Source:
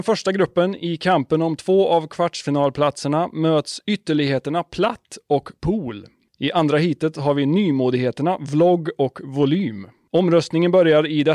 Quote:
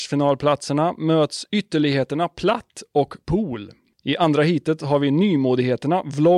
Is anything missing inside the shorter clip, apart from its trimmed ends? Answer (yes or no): no